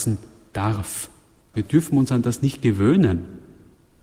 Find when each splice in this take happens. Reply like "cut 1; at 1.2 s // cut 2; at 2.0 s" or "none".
cut 1; at 1.5 s